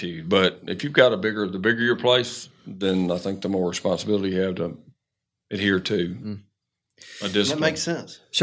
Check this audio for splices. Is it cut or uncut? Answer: uncut